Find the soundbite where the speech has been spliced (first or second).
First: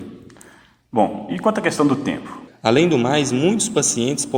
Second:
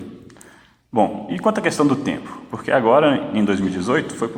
first